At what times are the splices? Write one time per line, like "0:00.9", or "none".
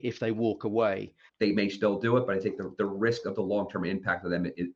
0:01.3